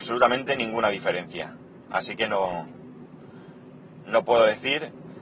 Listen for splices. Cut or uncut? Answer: uncut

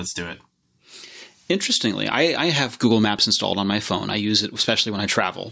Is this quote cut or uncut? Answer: uncut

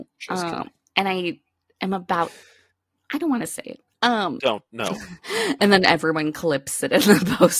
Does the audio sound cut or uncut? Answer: cut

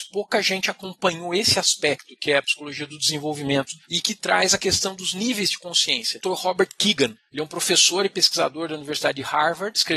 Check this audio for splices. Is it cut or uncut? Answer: cut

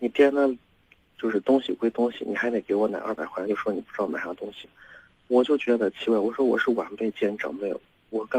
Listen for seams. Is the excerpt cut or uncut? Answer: uncut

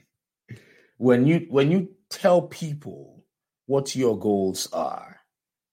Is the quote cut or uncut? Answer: uncut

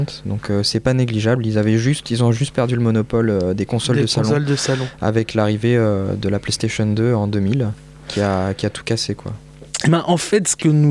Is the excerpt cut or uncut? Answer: uncut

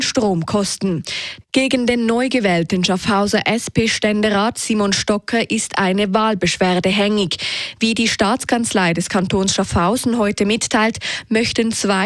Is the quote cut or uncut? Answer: cut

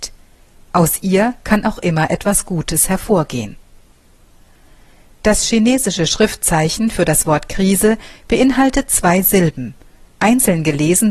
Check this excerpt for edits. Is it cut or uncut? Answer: uncut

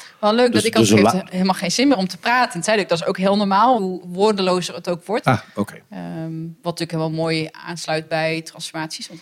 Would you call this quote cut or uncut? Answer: cut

